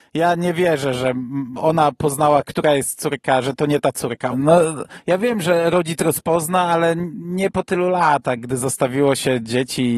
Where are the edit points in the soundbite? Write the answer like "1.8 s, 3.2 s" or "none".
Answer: 4.3 s